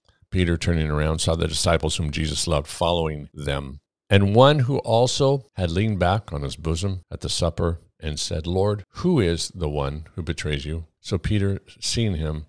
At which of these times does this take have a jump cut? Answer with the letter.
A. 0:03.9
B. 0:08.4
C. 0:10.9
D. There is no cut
D